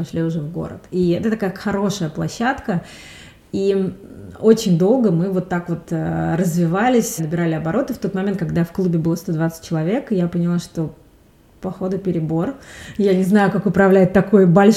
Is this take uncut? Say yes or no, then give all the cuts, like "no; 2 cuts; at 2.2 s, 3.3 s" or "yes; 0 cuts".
no; 1 cut; at 7.2 s